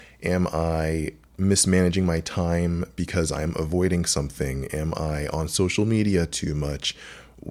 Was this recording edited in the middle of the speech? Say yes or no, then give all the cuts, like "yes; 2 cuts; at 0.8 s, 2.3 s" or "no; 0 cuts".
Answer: no; 0 cuts